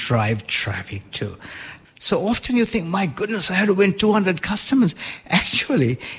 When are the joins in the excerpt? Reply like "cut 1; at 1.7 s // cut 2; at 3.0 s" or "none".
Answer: cut 1; at 1.9 s